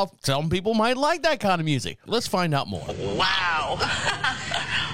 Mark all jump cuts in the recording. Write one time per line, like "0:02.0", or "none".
0:02.1